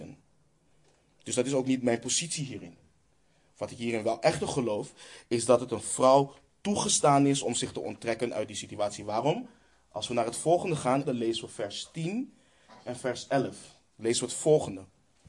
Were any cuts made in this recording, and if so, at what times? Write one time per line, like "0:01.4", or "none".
0:11.0